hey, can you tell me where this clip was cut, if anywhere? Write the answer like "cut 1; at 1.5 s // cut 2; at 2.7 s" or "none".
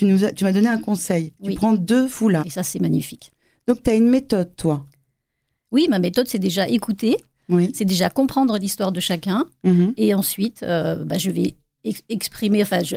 cut 1; at 2.4 s